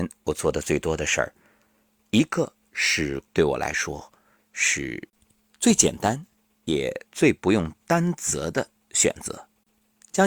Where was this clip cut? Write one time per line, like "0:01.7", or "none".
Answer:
0:03.3
0:07.1